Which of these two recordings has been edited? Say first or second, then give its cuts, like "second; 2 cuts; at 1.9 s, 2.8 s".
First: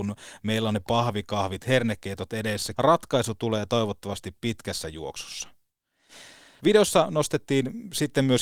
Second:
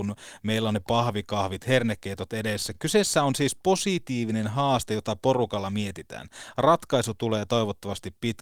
first; 2 cuts; at 2.7 s, 6.6 s